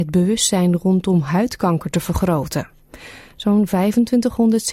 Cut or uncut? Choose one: uncut